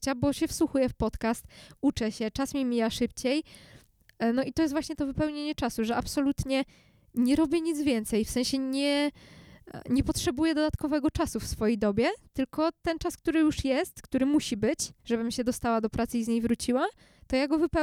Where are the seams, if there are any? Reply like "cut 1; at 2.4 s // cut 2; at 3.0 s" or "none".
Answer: cut 1; at 15.0 s